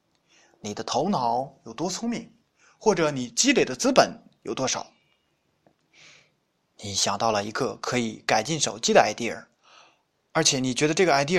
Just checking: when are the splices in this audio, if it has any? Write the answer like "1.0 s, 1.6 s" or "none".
none